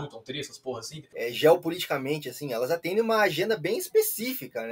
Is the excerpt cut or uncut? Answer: cut